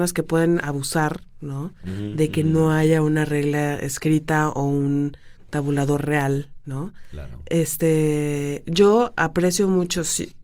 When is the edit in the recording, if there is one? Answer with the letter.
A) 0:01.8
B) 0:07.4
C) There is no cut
C